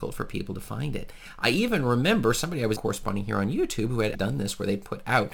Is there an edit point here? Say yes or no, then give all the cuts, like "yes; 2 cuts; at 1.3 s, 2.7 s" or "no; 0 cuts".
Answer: yes; 2 cuts; at 2.8 s, 4.1 s